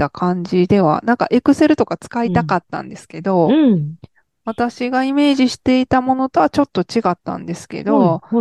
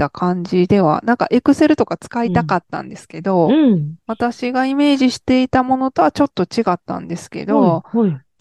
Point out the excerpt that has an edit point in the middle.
second; 1 cut; at 4.0 s

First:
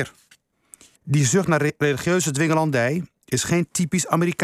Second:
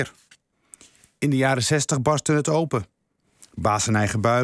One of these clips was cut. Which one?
first; 1 cut; at 1.0 s

